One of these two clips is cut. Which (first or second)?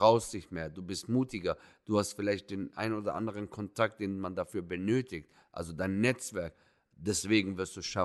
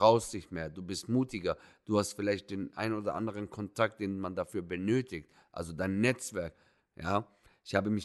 second